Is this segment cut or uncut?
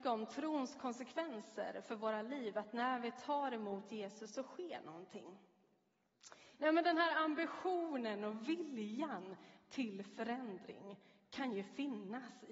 cut